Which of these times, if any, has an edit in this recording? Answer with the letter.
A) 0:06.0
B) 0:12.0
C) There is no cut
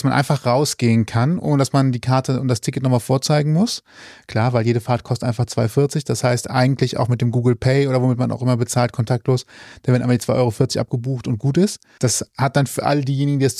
B